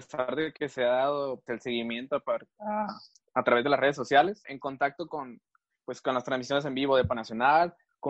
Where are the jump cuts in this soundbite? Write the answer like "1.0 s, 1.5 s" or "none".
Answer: 1.5 s, 4.4 s